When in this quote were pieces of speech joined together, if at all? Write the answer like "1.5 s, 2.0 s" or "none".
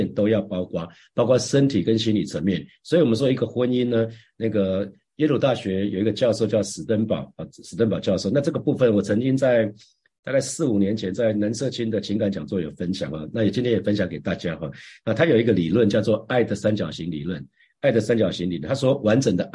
none